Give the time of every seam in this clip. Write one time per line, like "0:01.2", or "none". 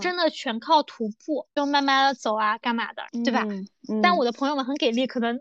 0:03.1